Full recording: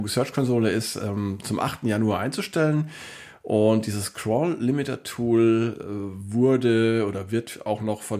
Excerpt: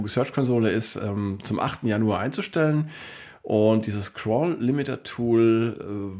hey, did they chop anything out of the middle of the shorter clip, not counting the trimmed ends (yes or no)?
no